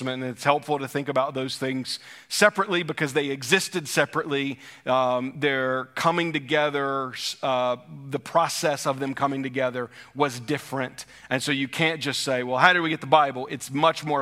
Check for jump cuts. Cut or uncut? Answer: uncut